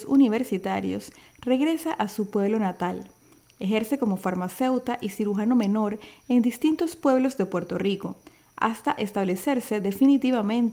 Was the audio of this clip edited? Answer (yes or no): no